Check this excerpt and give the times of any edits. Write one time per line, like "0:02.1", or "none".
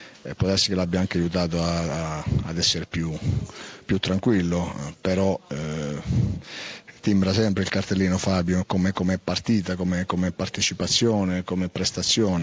none